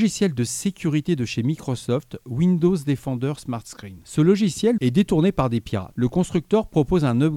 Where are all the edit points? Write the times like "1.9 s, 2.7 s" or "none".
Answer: 4.8 s, 5.9 s